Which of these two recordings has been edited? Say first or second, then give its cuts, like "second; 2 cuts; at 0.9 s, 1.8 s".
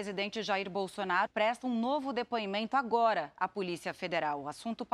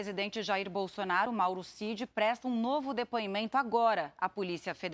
first; 1 cut; at 1.3 s